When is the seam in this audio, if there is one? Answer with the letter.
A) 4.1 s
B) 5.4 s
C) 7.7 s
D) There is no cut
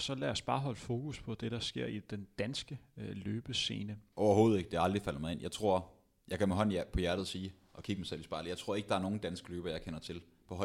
A